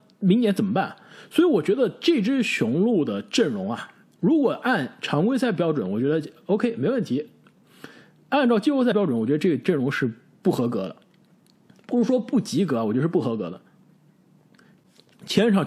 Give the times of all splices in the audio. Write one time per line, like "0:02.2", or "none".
none